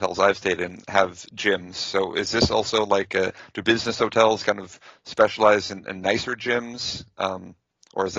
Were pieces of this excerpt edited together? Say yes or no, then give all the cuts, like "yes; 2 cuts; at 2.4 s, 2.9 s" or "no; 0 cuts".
no; 0 cuts